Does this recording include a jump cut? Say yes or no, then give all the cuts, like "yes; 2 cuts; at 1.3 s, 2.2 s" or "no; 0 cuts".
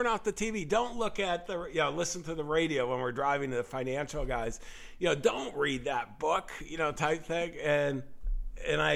no; 0 cuts